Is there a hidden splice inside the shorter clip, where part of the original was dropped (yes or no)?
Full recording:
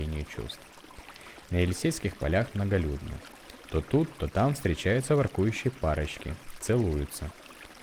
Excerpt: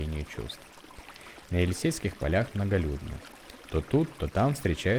no